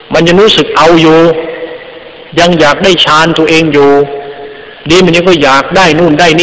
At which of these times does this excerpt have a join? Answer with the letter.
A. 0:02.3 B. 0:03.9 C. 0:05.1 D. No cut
A